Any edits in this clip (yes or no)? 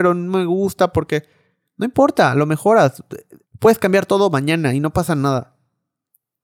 yes